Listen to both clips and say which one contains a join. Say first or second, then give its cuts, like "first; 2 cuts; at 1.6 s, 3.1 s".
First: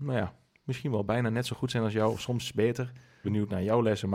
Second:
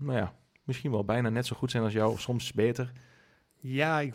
first; 1 cut; at 3.2 s